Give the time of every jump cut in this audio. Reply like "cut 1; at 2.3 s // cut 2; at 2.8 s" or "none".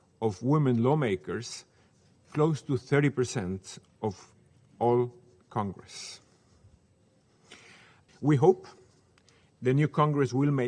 cut 1; at 8.1 s